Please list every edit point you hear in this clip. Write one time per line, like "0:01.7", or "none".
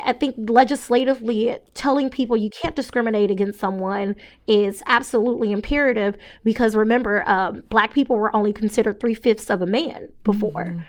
none